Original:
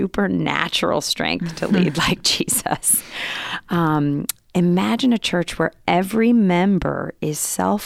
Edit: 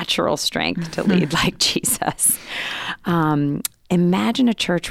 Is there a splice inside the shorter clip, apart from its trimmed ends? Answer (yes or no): no